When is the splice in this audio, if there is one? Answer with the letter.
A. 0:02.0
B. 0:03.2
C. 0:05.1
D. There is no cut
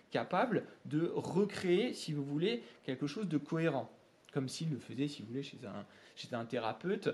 D